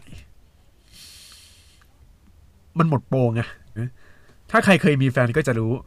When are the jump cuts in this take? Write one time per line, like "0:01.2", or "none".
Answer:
0:03.8